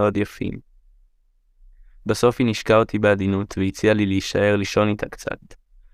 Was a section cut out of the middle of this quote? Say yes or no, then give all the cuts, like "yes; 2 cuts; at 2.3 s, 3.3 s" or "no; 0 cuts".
no; 0 cuts